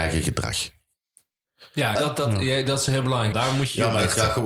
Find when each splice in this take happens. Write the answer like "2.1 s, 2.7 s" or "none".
2.0 s, 3.3 s